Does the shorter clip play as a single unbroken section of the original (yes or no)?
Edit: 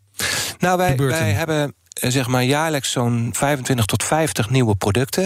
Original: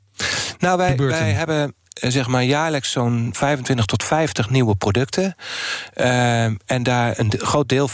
yes